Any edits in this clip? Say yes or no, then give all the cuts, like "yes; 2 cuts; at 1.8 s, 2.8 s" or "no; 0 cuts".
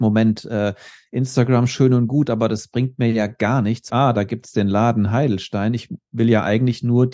yes; 1 cut; at 3.9 s